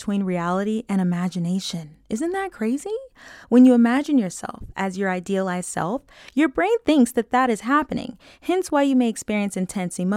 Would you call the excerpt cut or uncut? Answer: uncut